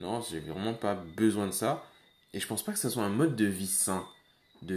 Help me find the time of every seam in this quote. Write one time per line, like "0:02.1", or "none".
0:02.2